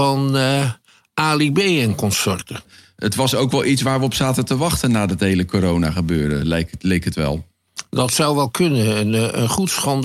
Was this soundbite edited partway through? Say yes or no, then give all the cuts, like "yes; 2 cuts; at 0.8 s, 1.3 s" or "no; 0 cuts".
no; 0 cuts